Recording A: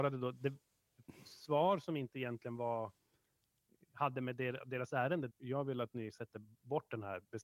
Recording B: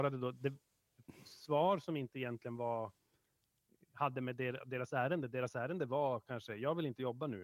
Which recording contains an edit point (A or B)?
A